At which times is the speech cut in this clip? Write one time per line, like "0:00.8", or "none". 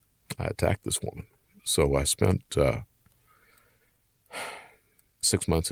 none